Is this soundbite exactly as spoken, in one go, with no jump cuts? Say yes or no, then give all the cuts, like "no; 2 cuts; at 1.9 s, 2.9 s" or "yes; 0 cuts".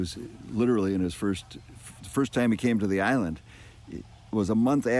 yes; 0 cuts